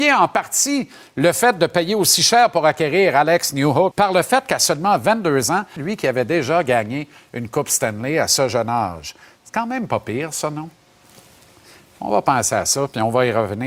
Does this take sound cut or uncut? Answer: cut